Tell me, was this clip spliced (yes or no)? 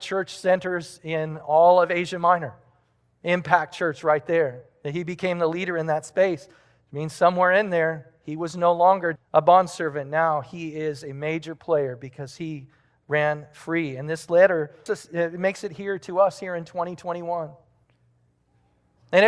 yes